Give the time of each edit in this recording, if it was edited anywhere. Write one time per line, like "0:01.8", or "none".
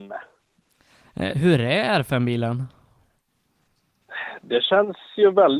0:01.3